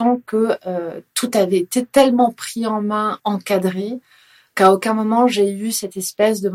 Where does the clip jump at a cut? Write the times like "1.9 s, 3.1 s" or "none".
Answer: 3.2 s